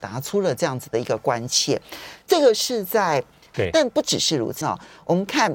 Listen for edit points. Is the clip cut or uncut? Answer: cut